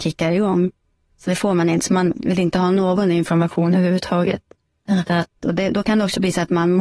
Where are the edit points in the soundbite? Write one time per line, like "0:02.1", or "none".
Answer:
0:01.1